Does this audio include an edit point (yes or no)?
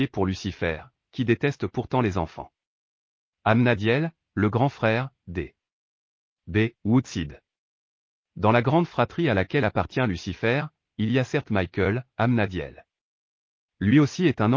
yes